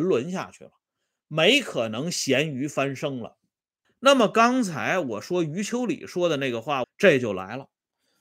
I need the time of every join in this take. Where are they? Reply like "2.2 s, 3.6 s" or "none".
3.8 s, 6.8 s

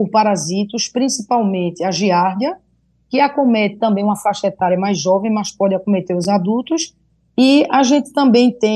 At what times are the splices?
none

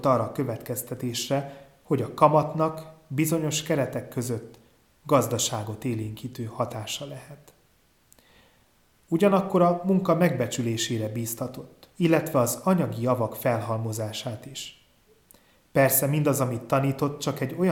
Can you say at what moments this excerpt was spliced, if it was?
11.9 s

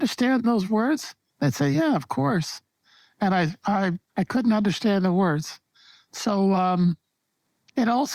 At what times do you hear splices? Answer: 4.1 s

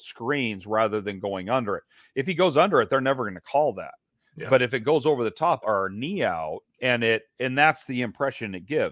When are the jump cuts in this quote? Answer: 5.6 s

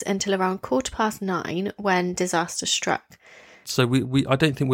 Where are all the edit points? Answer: 3.6 s

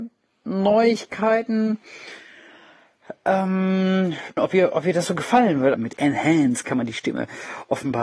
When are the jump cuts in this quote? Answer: 4.4 s, 5.7 s

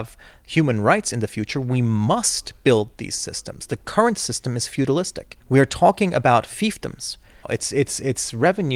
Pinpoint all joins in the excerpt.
5.4 s, 7.4 s

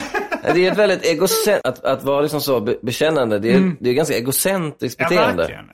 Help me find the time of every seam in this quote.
1.6 s

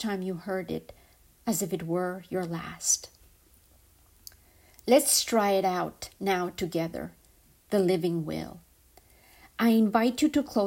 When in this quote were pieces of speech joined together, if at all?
none

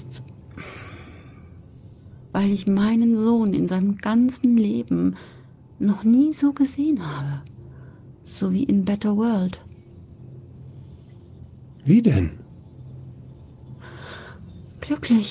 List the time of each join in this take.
2.3 s

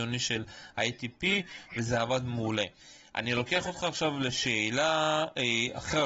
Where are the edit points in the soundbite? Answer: none

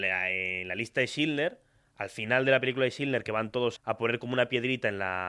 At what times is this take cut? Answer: 3.8 s

